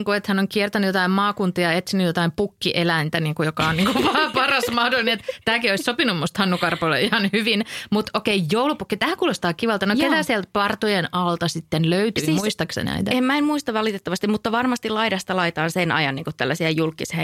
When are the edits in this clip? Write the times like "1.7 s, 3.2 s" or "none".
none